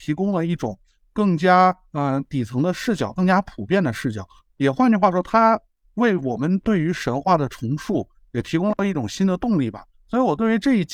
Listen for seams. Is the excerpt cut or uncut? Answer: uncut